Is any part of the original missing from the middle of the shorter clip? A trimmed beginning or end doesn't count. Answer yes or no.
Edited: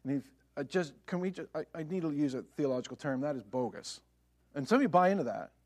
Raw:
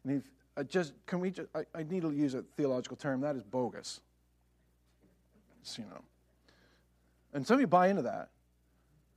yes